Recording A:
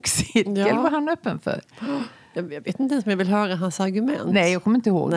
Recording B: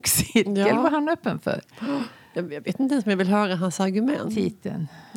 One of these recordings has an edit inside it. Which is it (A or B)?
B